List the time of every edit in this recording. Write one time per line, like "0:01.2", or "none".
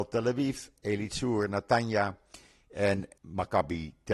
0:03.2